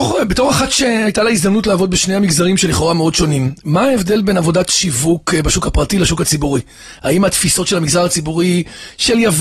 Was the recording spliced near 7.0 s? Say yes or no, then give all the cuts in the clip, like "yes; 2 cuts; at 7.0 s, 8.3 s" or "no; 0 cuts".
no; 0 cuts